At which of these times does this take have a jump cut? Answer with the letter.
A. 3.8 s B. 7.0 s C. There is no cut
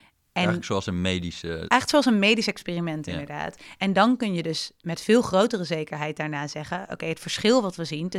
C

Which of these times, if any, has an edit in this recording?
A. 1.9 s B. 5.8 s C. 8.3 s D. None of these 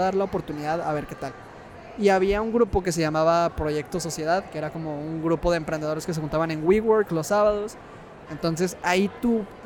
C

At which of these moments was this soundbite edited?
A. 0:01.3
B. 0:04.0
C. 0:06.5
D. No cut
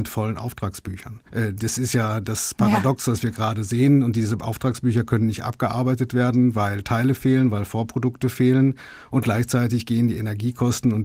A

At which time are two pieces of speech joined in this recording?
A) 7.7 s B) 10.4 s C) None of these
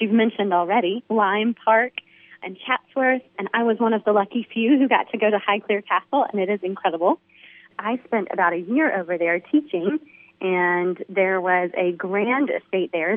B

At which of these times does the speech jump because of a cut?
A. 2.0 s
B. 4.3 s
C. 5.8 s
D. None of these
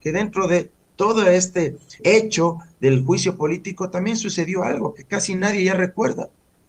A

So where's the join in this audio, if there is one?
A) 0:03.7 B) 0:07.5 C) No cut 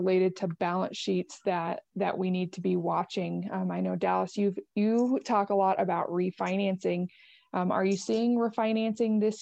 C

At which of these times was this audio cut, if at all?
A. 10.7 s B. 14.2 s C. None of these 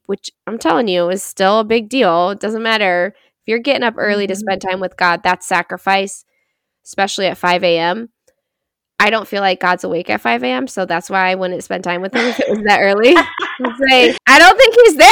B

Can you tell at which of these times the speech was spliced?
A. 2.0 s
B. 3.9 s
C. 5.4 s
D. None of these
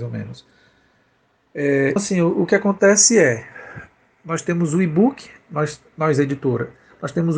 A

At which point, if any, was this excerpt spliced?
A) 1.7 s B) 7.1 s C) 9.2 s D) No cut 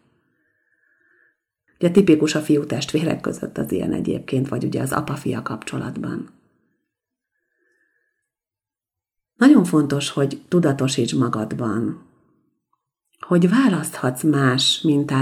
A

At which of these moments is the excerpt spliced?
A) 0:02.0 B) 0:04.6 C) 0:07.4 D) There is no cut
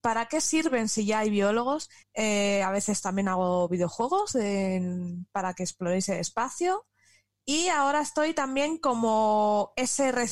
A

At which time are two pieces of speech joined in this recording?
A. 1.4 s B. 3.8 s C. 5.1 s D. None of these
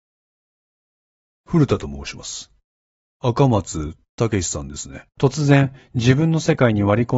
C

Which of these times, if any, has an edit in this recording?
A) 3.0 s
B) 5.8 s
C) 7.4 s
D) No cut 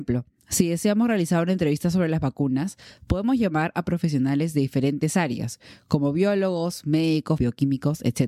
C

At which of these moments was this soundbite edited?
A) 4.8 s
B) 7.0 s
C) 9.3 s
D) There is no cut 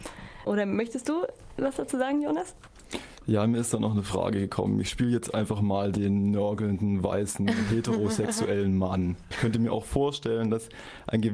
C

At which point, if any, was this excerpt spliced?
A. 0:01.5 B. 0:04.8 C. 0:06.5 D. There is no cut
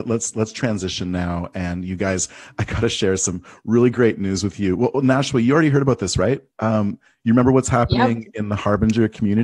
C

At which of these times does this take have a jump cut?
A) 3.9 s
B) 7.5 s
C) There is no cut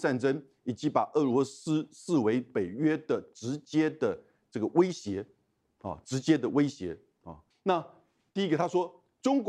B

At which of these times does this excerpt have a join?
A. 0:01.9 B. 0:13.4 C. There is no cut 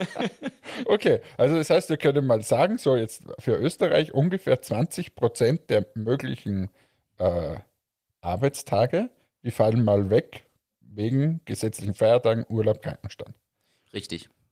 C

